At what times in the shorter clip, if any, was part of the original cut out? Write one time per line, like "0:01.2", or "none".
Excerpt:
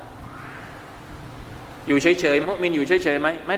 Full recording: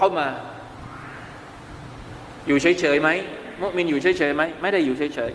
0:02.4